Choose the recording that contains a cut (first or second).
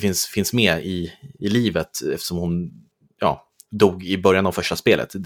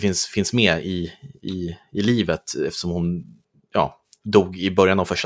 first